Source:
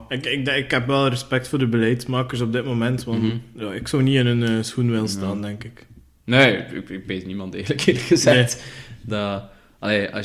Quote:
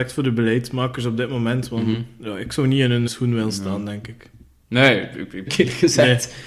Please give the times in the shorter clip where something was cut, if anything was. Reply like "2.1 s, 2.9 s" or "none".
3.1 s, 5.5 s